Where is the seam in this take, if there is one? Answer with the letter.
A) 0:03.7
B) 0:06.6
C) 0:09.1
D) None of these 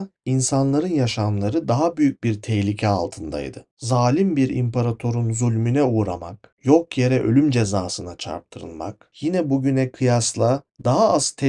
C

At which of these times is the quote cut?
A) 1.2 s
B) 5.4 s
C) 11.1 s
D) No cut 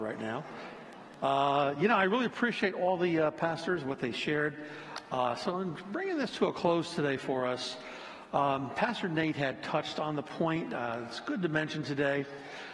D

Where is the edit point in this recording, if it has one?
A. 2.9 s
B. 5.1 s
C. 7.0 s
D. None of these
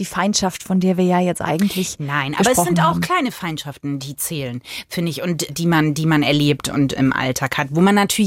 C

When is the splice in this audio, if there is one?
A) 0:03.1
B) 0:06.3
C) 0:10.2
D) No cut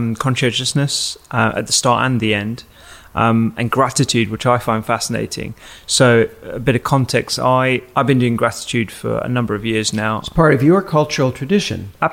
D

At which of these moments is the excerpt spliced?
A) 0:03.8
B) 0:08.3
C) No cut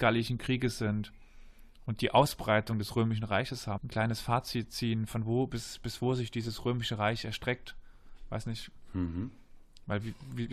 A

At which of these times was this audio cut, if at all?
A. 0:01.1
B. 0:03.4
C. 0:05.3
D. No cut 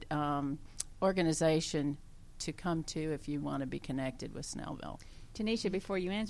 B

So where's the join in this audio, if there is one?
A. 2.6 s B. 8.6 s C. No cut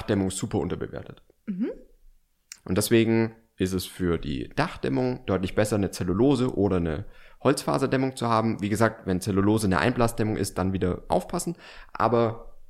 A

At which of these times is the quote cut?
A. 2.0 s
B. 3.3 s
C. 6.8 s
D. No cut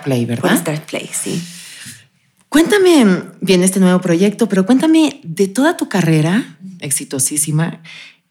C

